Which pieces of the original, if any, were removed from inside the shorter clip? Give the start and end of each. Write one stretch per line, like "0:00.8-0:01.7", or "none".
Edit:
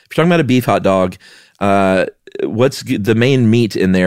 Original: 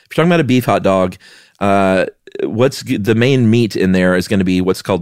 none

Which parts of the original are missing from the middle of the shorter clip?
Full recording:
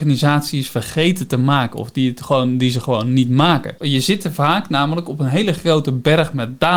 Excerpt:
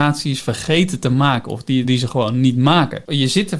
0:02.1-0:02.6

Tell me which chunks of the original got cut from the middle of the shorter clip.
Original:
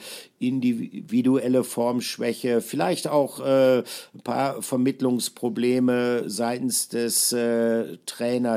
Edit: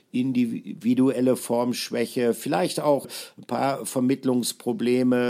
0:03.3-0:03.8

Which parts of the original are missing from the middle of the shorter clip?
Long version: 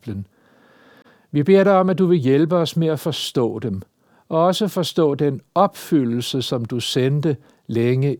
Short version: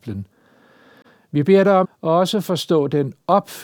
0:01.8-0:04.1

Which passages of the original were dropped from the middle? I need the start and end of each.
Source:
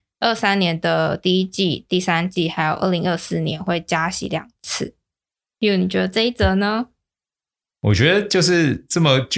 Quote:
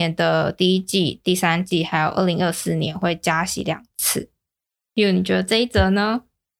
none

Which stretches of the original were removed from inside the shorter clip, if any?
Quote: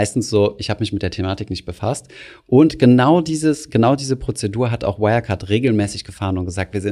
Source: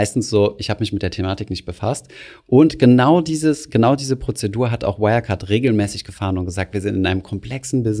none

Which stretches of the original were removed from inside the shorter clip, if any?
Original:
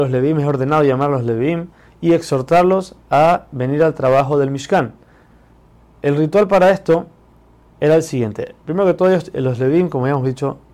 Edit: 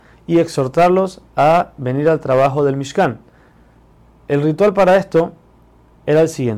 none

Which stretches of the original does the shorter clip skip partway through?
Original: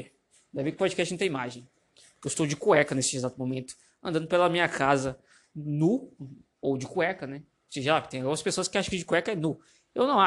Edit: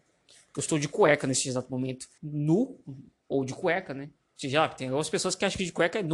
0:03.9-0:05.5

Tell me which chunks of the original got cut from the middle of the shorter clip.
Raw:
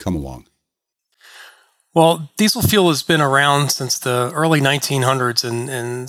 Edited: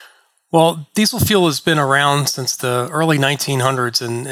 none

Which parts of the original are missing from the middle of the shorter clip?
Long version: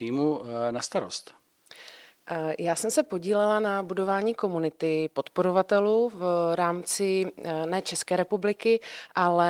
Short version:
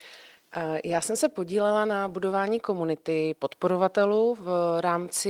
none

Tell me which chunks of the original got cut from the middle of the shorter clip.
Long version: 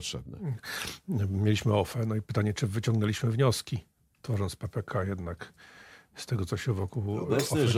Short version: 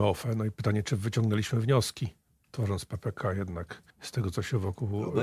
0:05.6-0:06.0

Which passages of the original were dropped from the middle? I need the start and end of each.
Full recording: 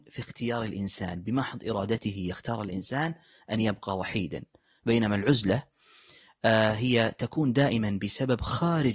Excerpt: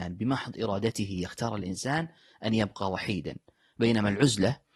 none

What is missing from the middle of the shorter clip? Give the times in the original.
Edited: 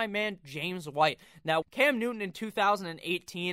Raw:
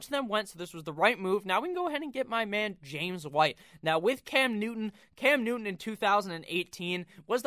0:04.0-0:05.1

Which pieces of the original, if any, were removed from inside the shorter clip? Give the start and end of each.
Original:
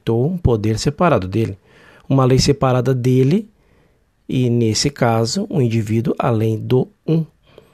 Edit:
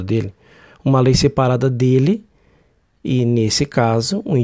none

